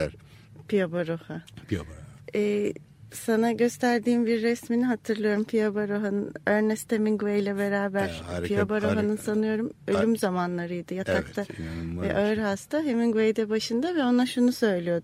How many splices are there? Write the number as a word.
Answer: zero